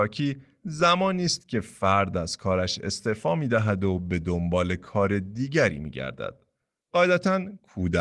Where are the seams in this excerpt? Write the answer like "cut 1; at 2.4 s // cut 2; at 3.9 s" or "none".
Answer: cut 1; at 6.9 s